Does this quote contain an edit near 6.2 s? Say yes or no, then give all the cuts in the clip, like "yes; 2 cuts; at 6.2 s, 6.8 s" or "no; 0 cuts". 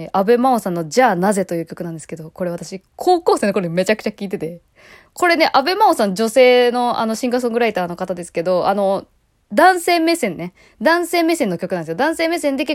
no; 0 cuts